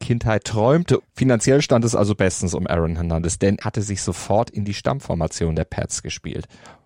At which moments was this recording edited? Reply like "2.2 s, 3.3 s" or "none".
1.0 s, 3.6 s